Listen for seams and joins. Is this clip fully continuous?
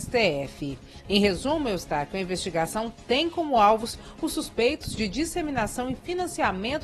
no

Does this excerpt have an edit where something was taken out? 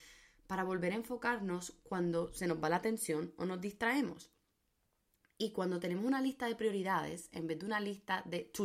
no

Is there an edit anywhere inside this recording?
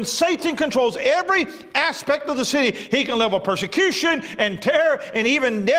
no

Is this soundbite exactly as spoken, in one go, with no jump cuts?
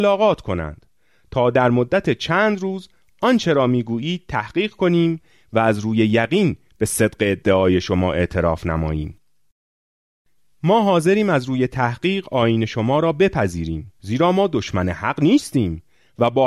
no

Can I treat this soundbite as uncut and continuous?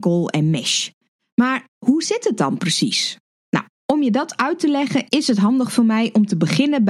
no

